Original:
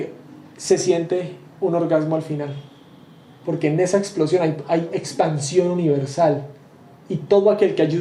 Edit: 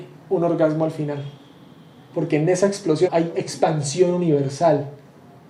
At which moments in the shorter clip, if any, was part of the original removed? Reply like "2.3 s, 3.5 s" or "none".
3.1 s

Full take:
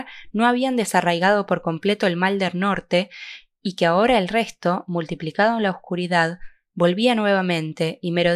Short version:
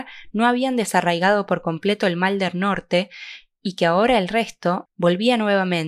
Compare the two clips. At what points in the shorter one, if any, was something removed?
4.9 s

